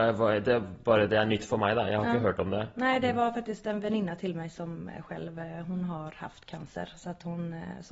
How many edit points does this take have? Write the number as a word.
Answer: zero